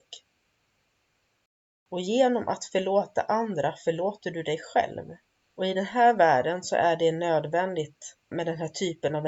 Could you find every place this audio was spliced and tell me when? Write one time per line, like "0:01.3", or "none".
0:08.3

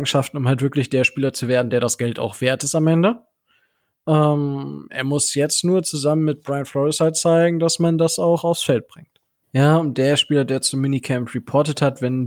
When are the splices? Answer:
0:09.4

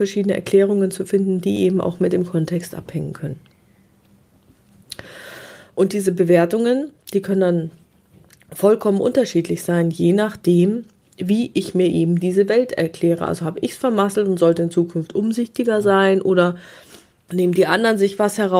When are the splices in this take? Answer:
none

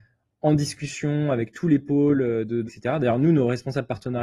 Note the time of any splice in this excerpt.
0:02.7

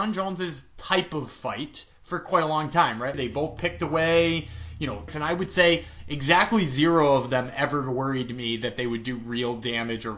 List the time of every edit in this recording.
0:03.1
0:05.1

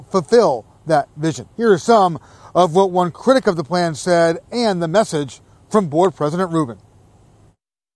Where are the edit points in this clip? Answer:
0:01.5

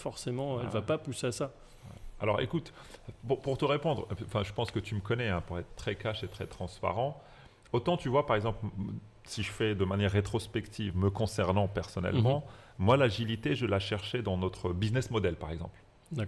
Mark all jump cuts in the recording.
0:05.7

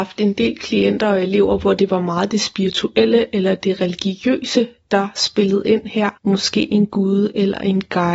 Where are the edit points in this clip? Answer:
0:06.2

